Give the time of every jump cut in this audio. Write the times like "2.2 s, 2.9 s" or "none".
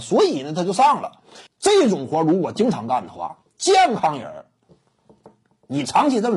1.5 s